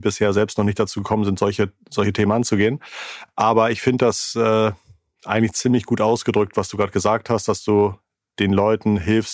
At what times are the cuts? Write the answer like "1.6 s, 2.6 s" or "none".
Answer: none